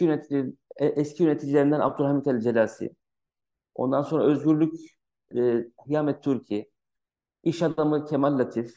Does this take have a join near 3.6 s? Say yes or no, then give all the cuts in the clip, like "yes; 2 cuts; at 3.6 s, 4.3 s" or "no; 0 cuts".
no; 1 cut; at 5.3 s